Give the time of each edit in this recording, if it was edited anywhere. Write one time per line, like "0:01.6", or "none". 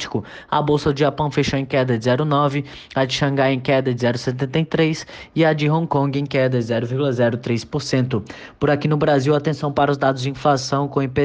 none